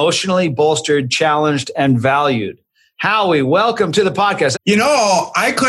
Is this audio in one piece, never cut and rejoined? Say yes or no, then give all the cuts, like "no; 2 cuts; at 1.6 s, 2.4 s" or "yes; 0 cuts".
no; 1 cut; at 4.5 s